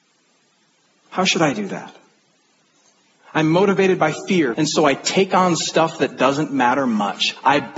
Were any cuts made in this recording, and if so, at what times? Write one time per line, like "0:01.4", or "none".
0:03.2
0:04.5